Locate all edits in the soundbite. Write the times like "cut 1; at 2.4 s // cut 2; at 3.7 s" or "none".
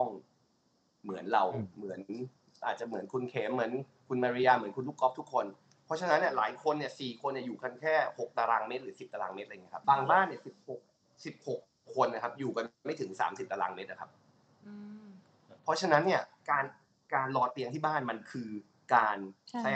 cut 1; at 9.8 s // cut 2; at 12.7 s